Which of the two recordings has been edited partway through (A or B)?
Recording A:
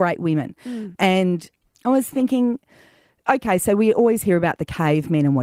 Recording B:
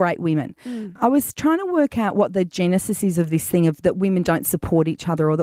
A